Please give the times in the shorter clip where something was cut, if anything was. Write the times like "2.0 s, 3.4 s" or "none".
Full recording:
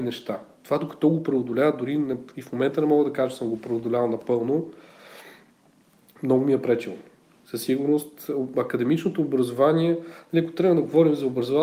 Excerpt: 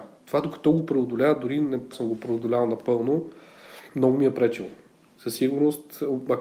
1.9 s, 3.9 s